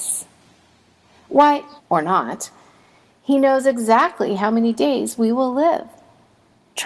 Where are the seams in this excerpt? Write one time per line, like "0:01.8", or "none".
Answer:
0:01.8